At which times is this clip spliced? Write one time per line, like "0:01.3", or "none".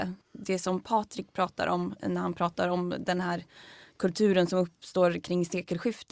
none